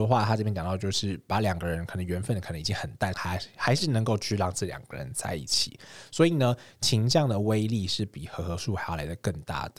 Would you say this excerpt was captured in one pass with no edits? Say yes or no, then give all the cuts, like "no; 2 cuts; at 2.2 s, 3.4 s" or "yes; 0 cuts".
no; 1 cut; at 3.1 s